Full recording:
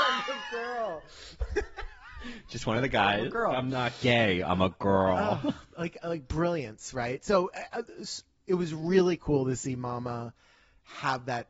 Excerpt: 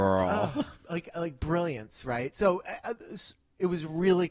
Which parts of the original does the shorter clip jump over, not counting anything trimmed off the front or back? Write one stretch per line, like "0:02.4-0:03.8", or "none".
none